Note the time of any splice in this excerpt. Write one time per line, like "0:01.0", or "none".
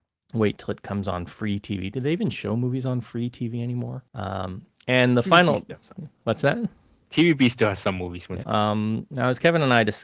0:04.1
0:08.4